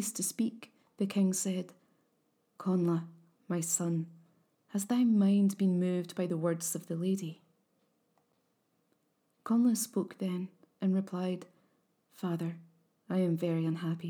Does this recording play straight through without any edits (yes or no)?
yes